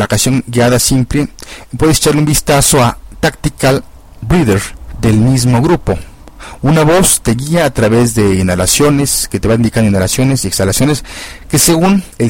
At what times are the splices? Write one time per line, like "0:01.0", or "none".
none